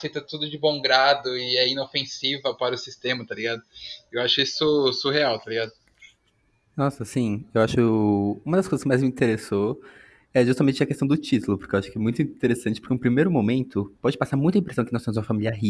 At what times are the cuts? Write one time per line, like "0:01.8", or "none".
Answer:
none